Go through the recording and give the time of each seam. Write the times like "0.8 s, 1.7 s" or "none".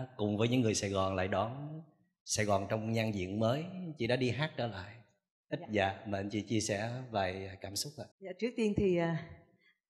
5.6 s, 8.1 s